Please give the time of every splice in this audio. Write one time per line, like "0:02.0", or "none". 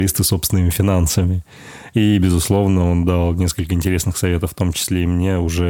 none